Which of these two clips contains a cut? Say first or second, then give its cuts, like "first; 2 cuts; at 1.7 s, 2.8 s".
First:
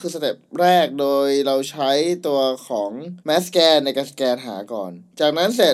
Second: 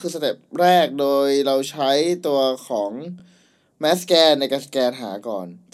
first; 1 cut; at 3.2 s